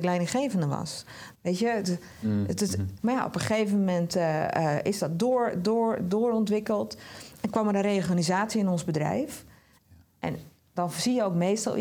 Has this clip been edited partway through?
yes; 3 cuts; at 1.3 s, 3.0 s, 9.8 s

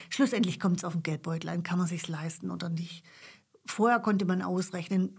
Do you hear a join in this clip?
no; 0 cuts

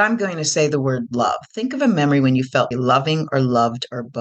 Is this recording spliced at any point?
yes; 1 cut; at 2.7 s

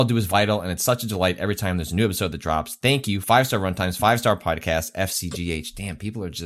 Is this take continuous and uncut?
yes; 0 cuts

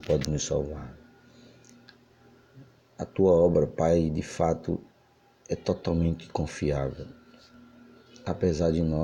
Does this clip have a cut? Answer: no; 0 cuts

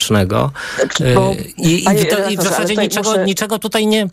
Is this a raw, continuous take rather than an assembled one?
yes; 0 cuts

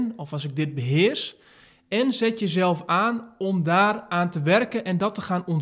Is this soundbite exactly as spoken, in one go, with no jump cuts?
yes; 0 cuts

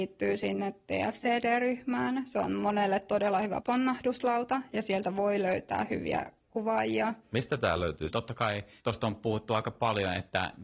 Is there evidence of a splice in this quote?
yes; 1 cut; at 8.1 s

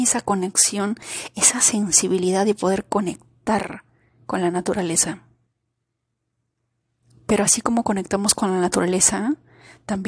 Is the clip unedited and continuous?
yes; 0 cuts

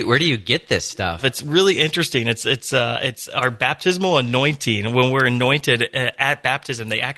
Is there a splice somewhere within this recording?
yes; 1 cut; at 1.2 s

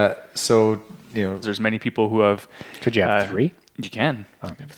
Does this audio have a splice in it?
yes; 1 cut; at 1.4 s

